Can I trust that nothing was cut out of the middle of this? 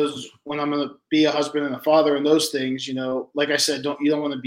yes; 0 cuts

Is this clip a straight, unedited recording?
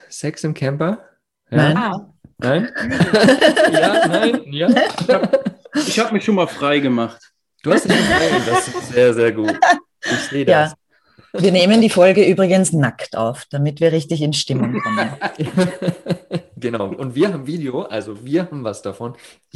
yes; 0 cuts

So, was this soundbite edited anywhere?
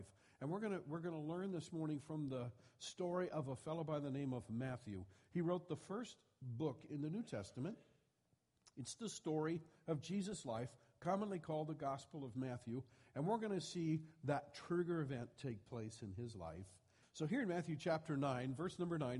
yes; 1 cut; at 17.0 s

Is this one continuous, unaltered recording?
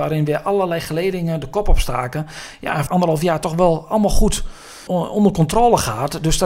no; 2 cuts; at 2.9 s, 4.9 s

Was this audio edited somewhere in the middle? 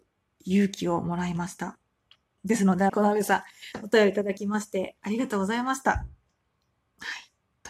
yes; 1 cut; at 2.9 s

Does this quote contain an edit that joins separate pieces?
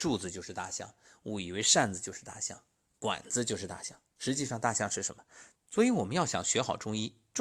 yes; 1 cut; at 5.6 s

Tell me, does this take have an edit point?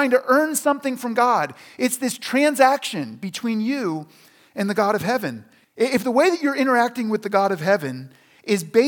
yes; 1 cut; at 5.6 s

